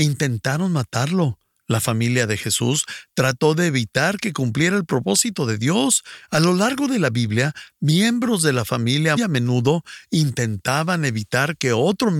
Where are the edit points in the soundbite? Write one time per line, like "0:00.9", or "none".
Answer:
0:07.7
0:09.2